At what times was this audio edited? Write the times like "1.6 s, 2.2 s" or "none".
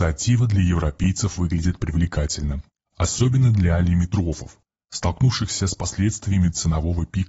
none